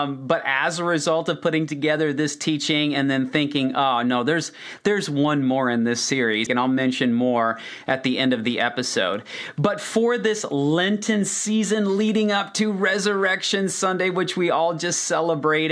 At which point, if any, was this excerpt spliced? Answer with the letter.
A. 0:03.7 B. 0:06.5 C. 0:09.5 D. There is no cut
B